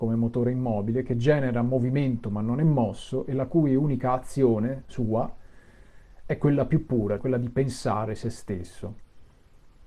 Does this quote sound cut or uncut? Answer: cut